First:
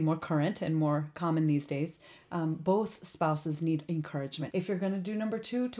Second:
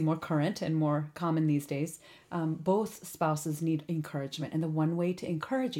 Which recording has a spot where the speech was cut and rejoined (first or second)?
first